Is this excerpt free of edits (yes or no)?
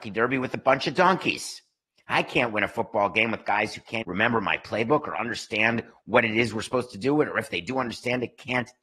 no